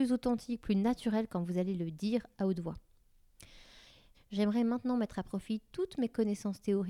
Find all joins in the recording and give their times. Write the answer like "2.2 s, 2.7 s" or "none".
4.1 s